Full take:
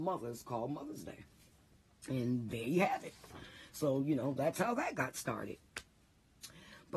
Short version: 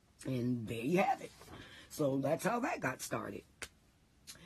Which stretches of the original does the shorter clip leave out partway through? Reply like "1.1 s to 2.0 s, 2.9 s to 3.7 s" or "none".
4.0 s to 4.4 s